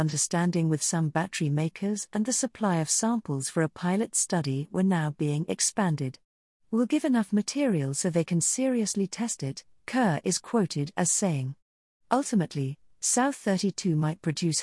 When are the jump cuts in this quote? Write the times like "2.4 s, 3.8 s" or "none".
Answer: none